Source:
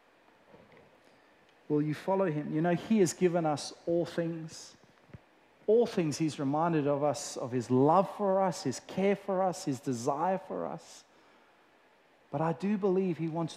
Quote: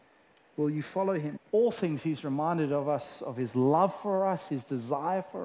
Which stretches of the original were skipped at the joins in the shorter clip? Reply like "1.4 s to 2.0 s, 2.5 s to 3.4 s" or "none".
2.5 s to 5.5 s, 8.6 s to 9.6 s